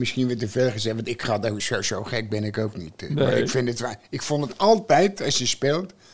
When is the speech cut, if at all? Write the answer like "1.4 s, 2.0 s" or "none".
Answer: none